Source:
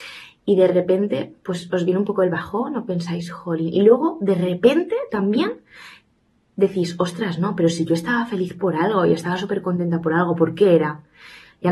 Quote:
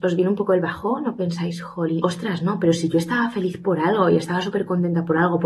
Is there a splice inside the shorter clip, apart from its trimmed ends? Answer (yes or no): yes